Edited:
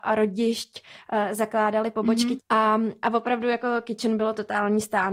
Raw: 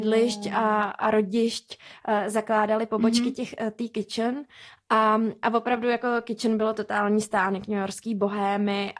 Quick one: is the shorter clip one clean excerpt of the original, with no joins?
no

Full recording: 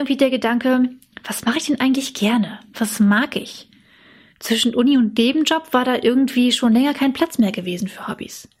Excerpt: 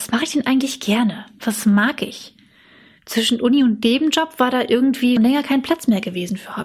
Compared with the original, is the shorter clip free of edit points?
no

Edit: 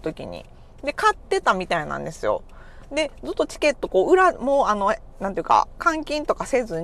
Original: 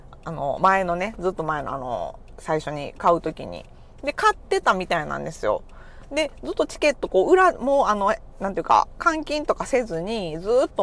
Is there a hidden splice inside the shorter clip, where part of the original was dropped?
no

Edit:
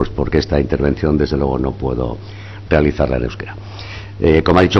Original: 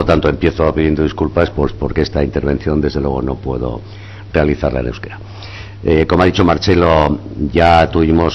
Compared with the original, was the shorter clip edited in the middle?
no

